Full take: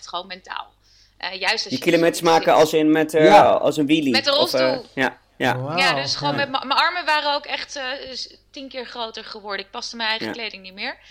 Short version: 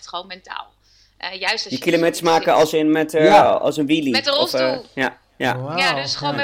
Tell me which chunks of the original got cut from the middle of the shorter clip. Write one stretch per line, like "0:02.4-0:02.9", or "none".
none